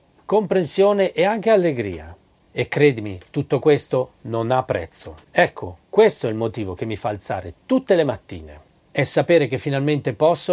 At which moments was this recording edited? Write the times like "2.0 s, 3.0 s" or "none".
none